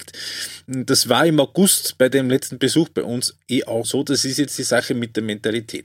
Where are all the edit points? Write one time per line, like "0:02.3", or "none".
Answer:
0:03.8